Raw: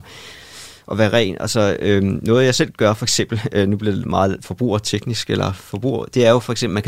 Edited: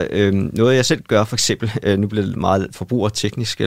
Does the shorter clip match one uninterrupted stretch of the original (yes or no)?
yes